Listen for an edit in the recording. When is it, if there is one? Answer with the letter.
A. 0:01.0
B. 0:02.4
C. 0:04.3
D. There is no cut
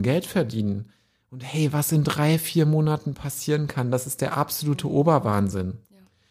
D